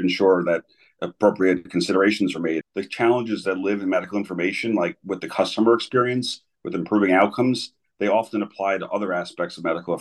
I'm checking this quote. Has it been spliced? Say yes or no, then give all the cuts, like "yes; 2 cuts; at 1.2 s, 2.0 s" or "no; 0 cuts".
yes; 1 cut; at 2.6 s